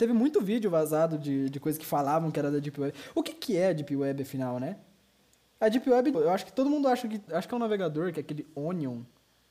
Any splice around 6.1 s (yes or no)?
yes